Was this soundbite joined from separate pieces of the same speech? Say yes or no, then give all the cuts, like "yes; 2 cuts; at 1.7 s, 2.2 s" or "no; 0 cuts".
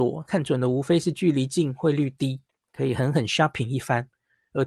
no; 0 cuts